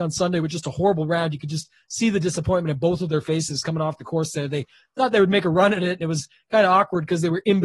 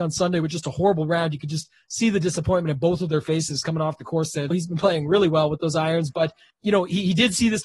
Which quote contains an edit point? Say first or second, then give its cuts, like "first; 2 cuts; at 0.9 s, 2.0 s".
second; 2 cuts; at 4.5 s, 6.5 s